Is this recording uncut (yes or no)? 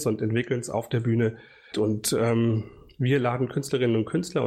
no